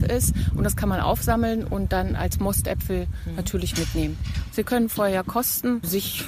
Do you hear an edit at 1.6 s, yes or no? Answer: no